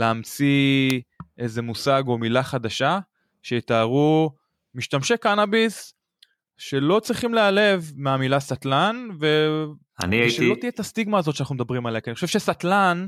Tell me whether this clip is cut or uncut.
uncut